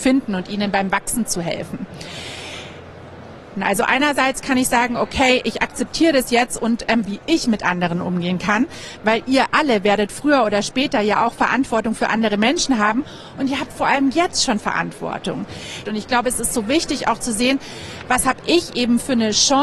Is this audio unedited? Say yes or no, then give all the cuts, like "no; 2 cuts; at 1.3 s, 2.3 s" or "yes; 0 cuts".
no; 3 cuts; at 3.5 s, 7.1 s, 15.8 s